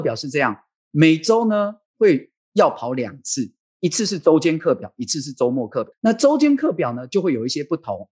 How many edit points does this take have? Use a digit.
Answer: 1